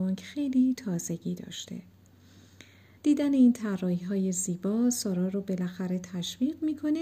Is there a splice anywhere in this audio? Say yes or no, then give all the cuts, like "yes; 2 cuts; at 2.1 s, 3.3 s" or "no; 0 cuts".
yes; 1 cut; at 3.0 s